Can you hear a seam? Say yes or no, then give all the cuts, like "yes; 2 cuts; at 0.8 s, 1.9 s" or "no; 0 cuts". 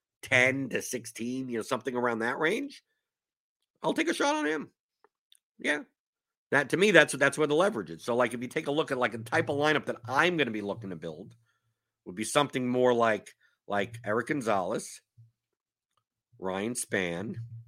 no; 0 cuts